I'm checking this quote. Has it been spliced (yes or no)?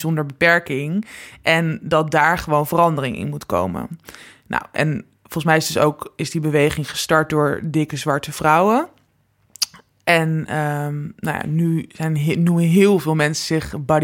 no